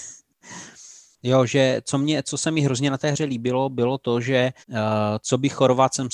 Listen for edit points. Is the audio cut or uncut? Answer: cut